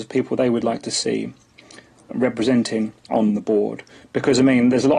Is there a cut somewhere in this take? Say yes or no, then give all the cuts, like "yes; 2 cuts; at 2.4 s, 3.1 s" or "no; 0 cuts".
no; 0 cuts